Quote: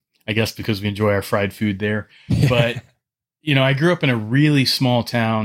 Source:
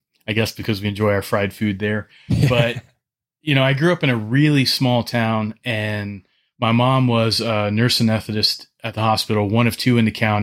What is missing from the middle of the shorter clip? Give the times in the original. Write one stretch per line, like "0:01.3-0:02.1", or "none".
none